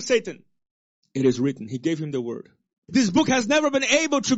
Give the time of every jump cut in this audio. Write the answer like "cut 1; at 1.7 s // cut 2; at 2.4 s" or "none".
cut 1; at 1.0 s // cut 2; at 2.9 s